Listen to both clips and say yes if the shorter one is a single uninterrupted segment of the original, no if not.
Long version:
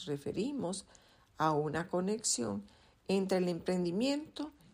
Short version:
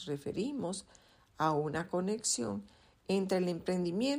yes